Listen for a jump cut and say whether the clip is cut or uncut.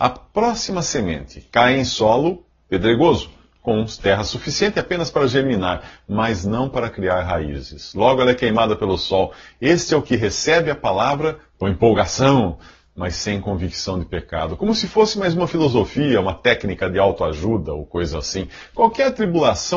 uncut